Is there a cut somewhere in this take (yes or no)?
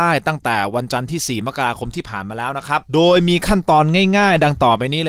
yes